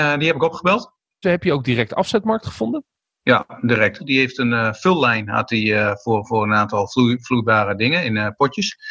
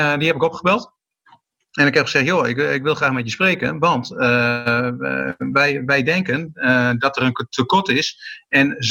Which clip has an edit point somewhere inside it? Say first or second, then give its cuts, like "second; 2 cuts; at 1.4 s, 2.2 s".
first; 2 cuts; at 1.2 s, 4.0 s